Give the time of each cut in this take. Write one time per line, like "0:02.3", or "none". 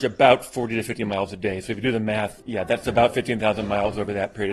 0:02.4